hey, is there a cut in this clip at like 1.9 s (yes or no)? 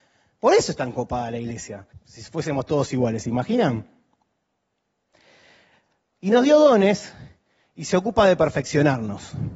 yes